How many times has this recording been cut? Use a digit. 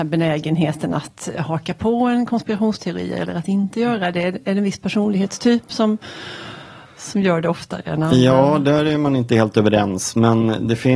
0